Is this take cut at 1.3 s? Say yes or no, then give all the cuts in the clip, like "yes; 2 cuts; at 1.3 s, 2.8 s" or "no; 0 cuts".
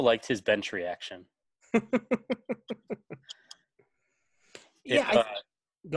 no; 0 cuts